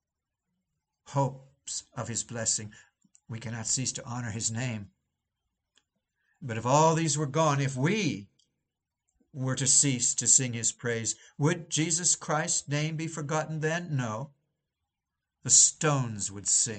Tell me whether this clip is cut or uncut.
uncut